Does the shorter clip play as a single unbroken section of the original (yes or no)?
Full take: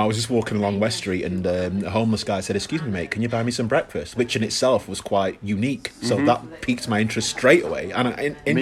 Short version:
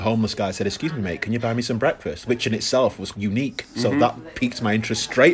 no